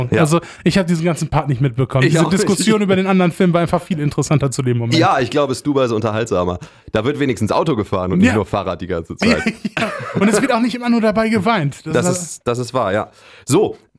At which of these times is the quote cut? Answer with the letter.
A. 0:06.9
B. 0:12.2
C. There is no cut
C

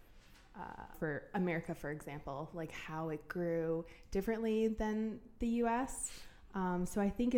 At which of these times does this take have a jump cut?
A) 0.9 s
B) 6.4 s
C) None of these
A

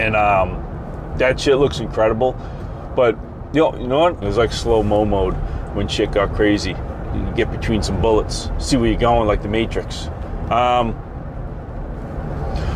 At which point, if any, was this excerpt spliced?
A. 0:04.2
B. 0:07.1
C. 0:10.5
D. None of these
A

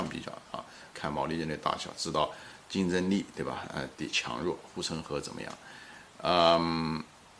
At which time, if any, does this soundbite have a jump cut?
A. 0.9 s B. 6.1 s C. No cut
A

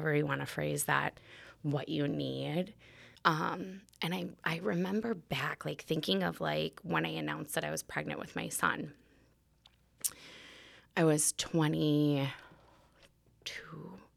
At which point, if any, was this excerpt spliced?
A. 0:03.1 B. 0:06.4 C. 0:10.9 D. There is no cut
A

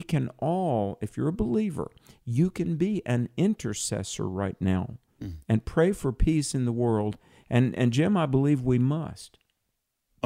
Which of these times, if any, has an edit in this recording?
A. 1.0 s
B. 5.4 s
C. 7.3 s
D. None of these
D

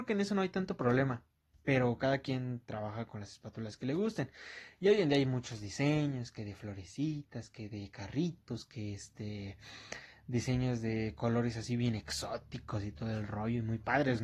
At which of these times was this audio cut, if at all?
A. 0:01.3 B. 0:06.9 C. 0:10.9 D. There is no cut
D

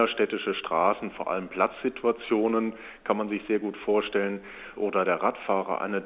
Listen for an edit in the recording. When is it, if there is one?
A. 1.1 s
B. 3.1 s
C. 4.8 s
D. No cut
C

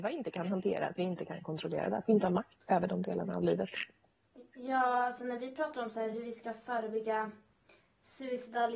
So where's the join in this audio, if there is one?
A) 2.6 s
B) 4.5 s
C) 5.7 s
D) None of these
A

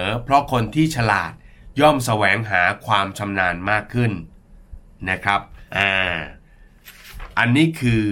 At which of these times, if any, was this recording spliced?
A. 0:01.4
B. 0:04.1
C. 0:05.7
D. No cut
C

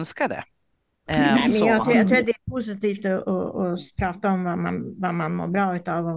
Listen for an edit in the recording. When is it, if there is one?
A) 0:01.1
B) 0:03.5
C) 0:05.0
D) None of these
A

